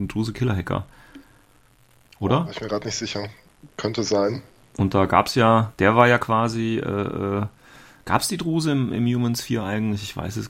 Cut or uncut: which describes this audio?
uncut